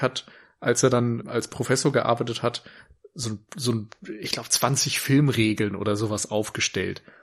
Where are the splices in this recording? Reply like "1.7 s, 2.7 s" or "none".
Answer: 1.2 s